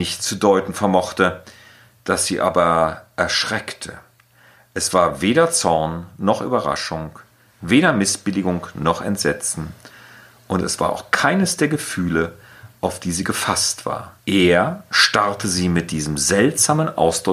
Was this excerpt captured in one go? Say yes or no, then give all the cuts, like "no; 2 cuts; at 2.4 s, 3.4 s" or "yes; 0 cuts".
no; 1 cut; at 14.2 s